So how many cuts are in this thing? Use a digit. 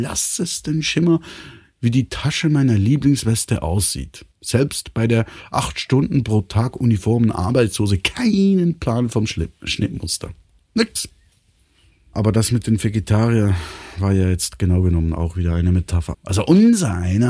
3